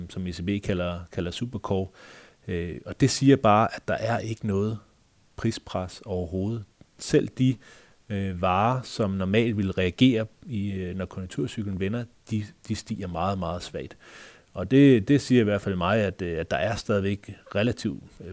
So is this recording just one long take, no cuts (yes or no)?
yes